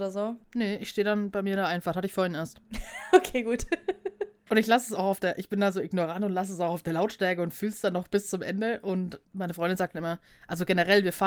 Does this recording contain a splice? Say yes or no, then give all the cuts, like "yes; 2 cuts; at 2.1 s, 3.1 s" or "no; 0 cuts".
no; 0 cuts